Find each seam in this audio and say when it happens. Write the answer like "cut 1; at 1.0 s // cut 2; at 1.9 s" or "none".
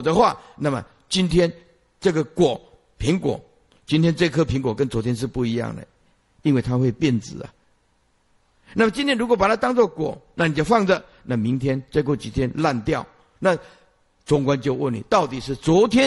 none